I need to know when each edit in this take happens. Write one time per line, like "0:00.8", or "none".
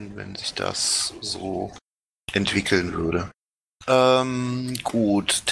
none